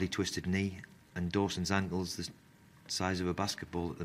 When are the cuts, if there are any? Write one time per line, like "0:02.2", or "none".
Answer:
none